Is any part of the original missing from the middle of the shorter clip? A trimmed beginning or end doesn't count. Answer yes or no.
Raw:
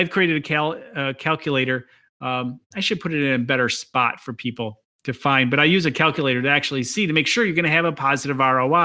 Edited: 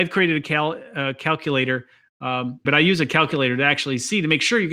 yes